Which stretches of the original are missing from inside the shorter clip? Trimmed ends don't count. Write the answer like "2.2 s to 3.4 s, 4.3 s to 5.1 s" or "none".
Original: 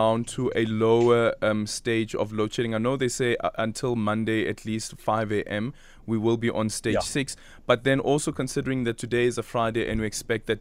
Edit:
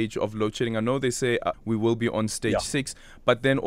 3.5 s to 5.9 s